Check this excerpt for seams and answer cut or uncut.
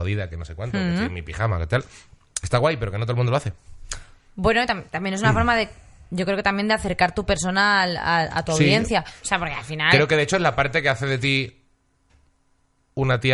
uncut